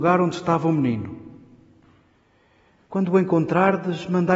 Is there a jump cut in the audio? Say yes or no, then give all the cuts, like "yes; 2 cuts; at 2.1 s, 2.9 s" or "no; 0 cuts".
yes; 1 cut; at 2.9 s